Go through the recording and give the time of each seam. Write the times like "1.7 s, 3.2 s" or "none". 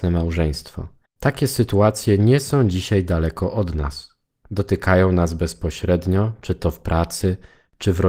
1.1 s